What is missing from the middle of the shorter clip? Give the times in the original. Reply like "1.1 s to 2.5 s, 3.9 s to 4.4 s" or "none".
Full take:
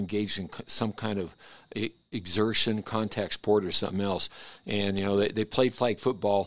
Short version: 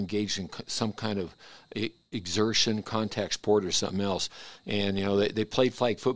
none